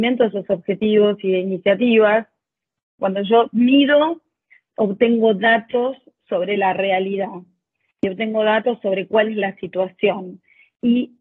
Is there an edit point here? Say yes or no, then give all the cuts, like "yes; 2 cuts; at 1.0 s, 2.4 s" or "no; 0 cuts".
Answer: yes; 1 cut; at 3.0 s